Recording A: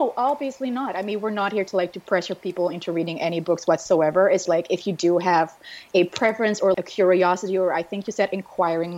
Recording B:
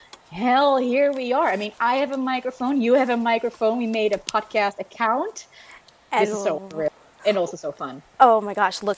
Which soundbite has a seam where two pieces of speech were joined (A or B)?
A